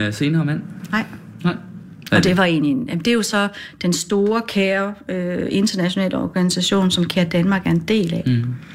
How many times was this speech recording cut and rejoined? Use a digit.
1